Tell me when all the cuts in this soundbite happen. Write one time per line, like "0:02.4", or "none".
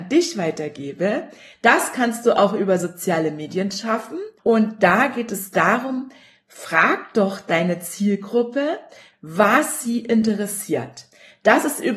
0:01.5
0:04.4
0:09.1